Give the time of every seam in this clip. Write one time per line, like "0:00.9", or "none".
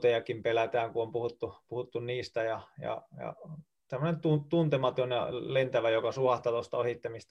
none